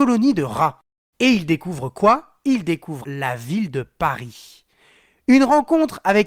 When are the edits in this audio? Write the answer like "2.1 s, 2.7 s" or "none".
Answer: 1.1 s, 3.0 s